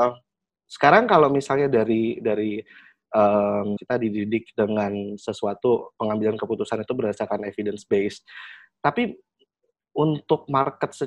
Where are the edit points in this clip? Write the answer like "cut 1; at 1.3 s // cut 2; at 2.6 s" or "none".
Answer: cut 1; at 3.8 s